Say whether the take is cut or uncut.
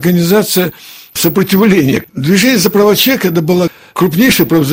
cut